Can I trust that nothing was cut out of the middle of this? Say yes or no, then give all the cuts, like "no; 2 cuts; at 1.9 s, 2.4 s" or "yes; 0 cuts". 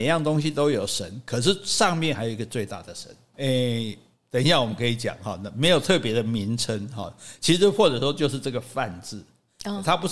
no; 1 cut; at 3.3 s